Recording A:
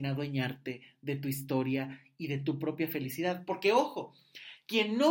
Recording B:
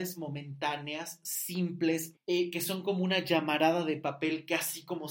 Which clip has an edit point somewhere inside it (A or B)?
B